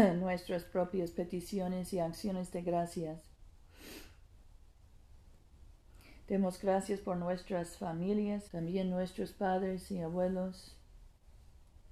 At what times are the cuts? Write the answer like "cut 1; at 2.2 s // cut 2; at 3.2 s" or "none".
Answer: cut 1; at 8.5 s

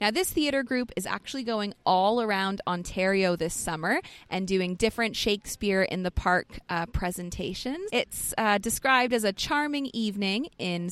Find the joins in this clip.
cut 1; at 7.9 s

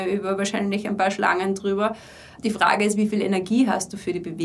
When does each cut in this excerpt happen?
cut 1; at 2.4 s

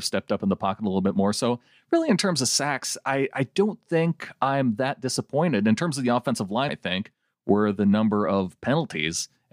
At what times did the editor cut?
cut 1; at 6.7 s

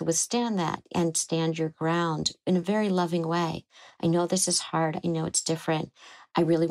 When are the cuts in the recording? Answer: none

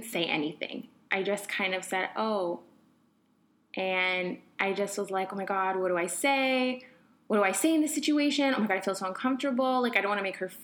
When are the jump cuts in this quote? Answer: none

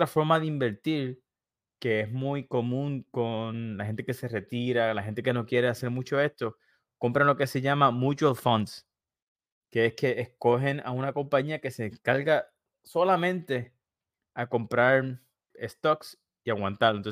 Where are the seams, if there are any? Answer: cut 1; at 15.5 s

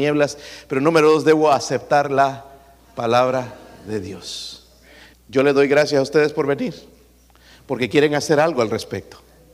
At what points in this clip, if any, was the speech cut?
cut 1; at 5.1 s

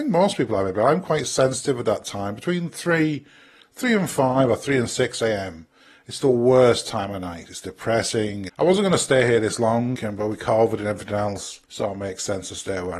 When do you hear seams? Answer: cut 1; at 8.5 s // cut 2; at 9.9 s // cut 3; at 11.6 s

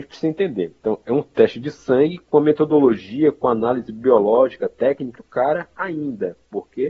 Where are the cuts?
cut 1; at 5.2 s

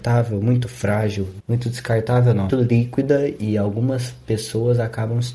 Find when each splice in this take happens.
cut 1; at 1.4 s // cut 2; at 2.5 s

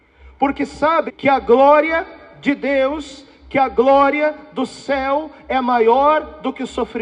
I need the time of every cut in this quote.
cut 1; at 1.1 s

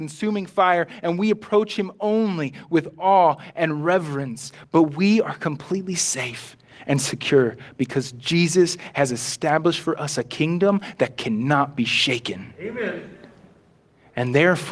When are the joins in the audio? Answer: none

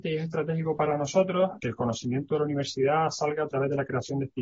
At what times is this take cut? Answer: cut 1; at 1.6 s

